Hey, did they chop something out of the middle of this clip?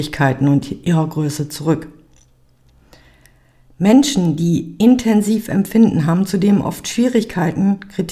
no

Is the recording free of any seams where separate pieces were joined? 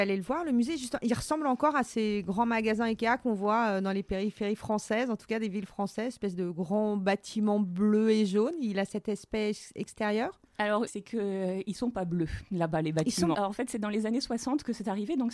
no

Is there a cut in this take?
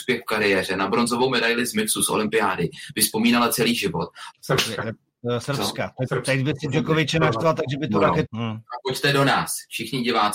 yes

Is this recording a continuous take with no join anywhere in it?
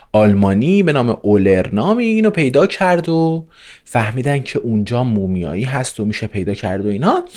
yes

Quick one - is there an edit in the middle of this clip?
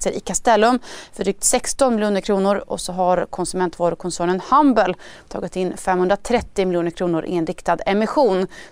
no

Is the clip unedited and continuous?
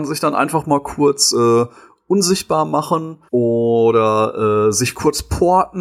no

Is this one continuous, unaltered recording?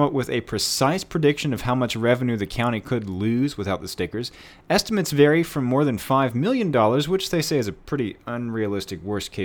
yes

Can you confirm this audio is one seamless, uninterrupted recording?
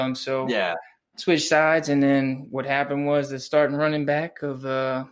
yes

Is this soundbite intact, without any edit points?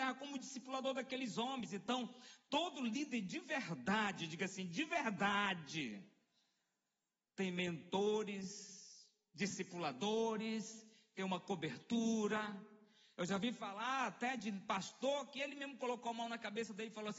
yes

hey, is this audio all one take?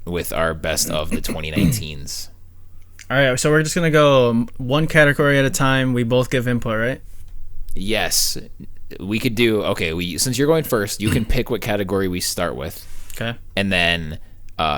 yes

